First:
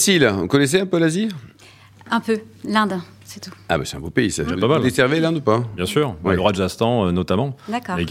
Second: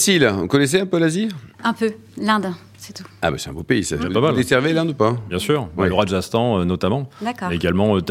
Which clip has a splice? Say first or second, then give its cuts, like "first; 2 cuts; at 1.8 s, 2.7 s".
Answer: second; 1 cut; at 1.5 s